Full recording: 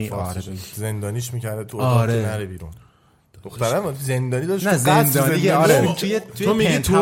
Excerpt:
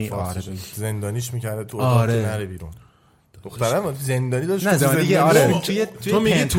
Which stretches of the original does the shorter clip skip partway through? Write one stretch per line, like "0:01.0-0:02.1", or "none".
0:04.8-0:05.1